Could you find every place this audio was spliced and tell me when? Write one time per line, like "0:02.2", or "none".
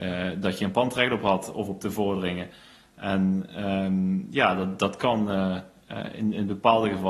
none